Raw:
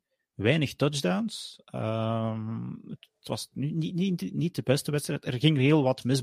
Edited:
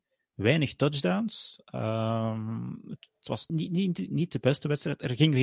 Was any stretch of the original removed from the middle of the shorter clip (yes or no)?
yes